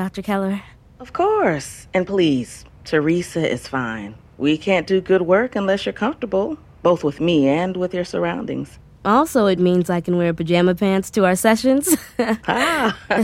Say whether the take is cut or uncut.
uncut